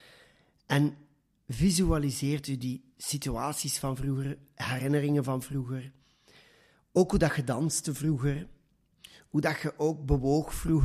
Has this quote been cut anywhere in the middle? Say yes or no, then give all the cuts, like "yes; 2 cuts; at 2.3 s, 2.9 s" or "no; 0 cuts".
no; 0 cuts